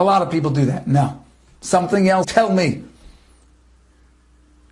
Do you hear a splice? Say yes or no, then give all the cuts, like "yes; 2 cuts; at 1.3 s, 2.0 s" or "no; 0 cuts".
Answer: yes; 1 cut; at 2.2 s